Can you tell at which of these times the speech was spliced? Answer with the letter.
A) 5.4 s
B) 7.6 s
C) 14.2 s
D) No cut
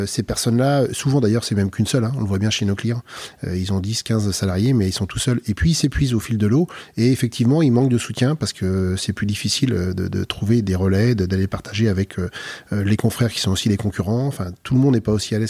D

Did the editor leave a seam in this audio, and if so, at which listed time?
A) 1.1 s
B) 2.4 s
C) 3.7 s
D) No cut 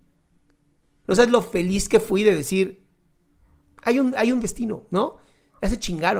A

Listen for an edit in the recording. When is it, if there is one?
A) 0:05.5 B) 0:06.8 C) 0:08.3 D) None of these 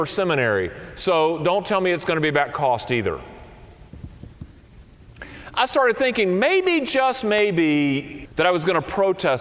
C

